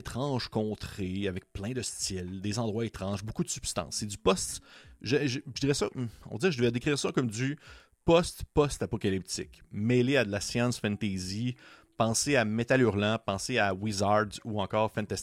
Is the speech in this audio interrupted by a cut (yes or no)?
no